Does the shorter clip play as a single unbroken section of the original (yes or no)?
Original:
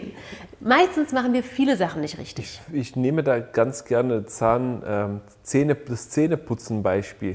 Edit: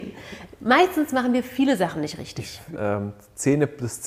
no